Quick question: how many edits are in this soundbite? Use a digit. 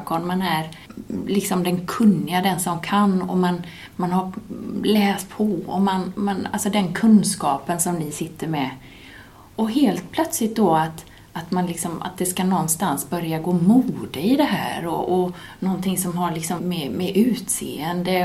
1